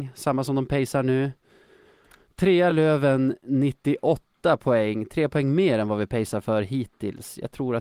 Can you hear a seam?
no; 0 cuts

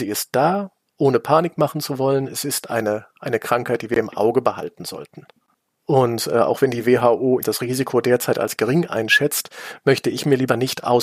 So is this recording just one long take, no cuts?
no; 2 cuts; at 5.8 s, 7.4 s

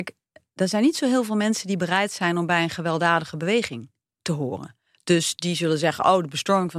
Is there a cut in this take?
no; 0 cuts

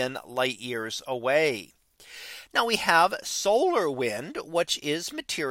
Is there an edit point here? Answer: yes; 1 cut; at 2.5 s

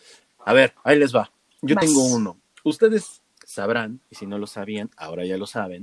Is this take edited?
no; 0 cuts

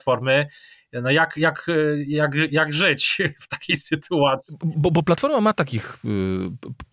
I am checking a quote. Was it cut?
no; 0 cuts

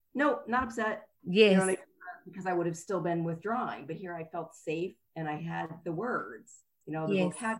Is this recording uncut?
no; 1 cut; at 1.1 s

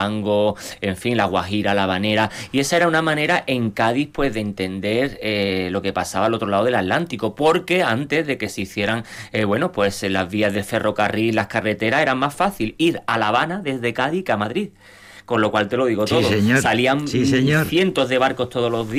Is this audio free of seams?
yes; 0 cuts

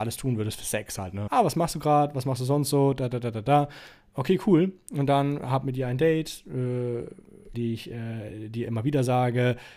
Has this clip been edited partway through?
yes; 2 cuts; at 1.3 s, 7.5 s

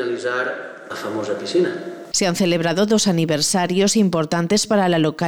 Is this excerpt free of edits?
no; 1 cut; at 2.1 s

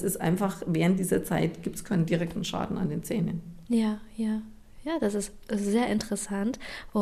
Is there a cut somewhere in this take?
no; 0 cuts

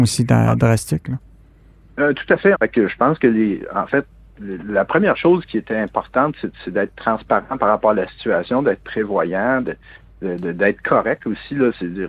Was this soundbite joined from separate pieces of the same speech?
yes; 1 cut; at 2.5 s

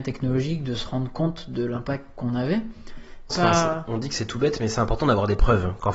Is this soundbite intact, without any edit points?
no; 1 cut; at 3.3 s

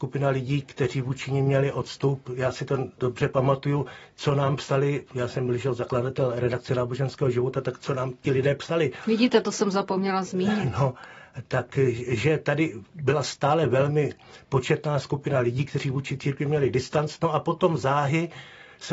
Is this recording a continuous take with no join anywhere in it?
yes; 0 cuts

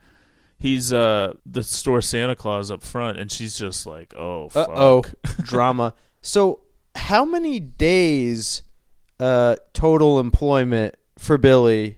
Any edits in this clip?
yes; 1 cut; at 1.4 s

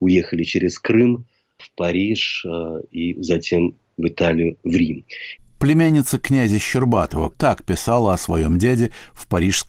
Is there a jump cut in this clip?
yes; 2 cuts; at 5.4 s, 7.3 s

